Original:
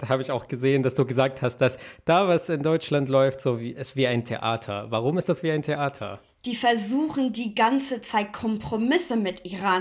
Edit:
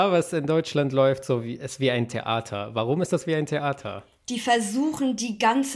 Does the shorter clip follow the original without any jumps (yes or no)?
yes